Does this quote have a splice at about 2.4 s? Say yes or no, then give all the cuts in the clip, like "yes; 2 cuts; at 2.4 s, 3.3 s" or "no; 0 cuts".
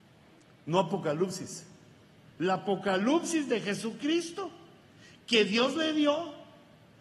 yes; 1 cut; at 2.4 s